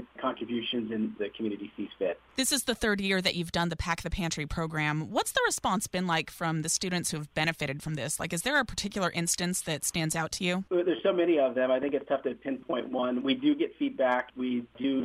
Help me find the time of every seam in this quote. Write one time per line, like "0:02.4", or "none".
0:01.1